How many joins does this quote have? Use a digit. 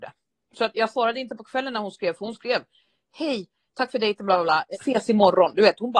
1